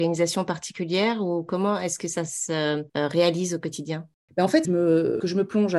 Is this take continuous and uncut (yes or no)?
no